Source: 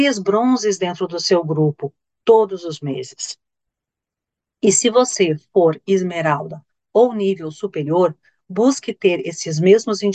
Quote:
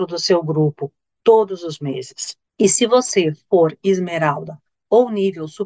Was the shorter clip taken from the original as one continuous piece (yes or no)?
no